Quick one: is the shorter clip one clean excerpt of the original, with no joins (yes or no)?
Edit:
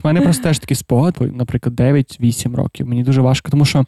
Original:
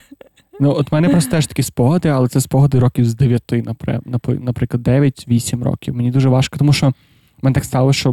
no